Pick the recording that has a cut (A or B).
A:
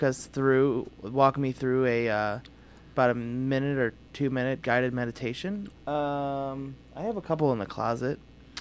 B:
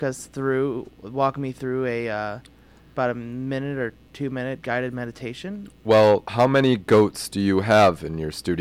A